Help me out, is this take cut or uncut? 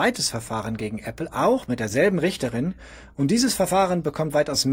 uncut